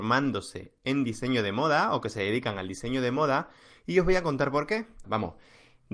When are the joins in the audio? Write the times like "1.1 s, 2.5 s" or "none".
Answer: 5.0 s